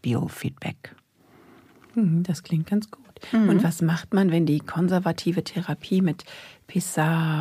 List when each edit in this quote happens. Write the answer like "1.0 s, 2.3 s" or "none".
none